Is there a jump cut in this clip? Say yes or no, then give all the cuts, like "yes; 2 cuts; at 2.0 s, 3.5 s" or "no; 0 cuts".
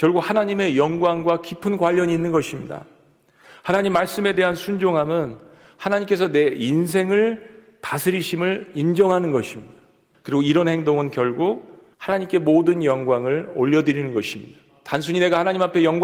yes; 2 cuts; at 10.1 s, 11.9 s